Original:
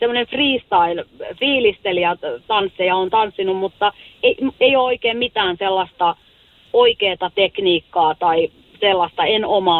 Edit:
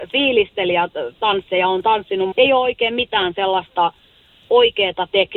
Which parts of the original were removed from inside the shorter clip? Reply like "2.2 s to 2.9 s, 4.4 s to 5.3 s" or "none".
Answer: 3.6 s to 4.5 s